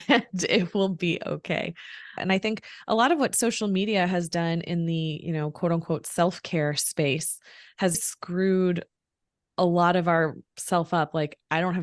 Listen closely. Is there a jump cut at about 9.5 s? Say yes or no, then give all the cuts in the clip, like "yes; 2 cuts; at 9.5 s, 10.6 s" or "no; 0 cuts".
no; 2 cuts; at 2.2 s, 7.9 s